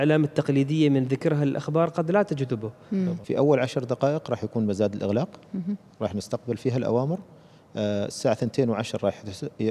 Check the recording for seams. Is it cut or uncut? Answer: cut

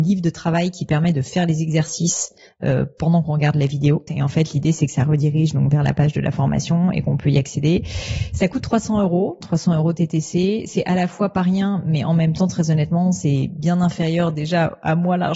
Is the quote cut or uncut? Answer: cut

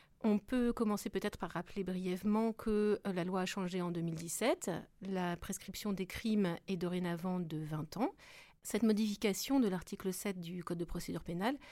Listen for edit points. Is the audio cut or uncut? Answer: cut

